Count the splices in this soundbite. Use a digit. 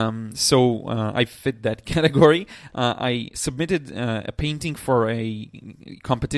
1